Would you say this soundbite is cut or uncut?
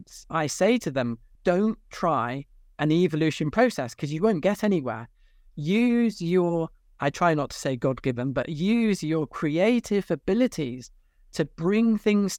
cut